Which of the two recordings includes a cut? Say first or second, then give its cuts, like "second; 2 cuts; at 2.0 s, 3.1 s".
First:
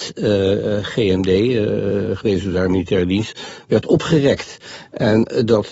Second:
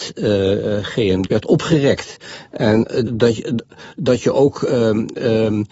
second; 2 cuts; at 1.3 s, 3.1 s